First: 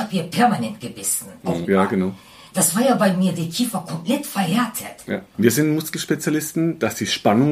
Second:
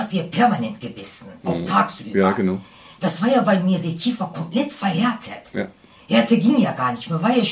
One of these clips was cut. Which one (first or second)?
first